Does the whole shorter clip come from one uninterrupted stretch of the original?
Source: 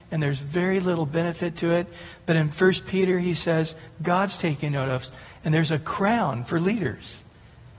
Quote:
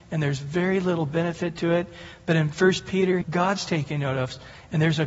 no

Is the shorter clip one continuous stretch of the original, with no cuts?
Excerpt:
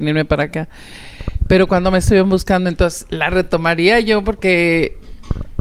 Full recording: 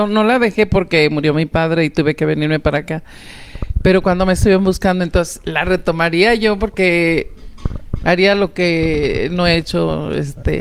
yes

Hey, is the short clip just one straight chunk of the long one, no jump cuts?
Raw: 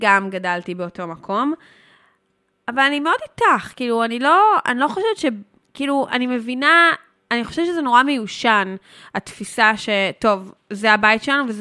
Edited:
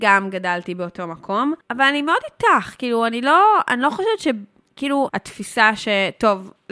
no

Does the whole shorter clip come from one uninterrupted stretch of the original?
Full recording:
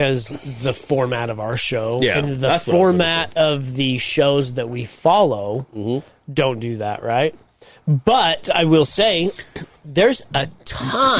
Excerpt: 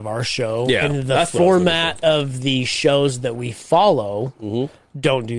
yes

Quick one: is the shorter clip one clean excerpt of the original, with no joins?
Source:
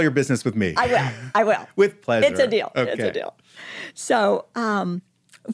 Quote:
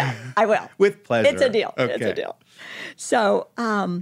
yes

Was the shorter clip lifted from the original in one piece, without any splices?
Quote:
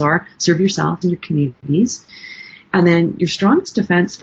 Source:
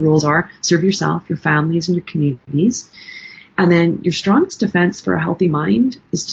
no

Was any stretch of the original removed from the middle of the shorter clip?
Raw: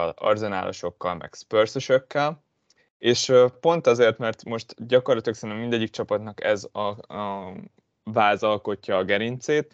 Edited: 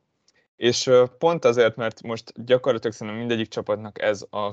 no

